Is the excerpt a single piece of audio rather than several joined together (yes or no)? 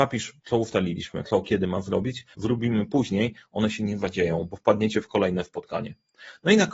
no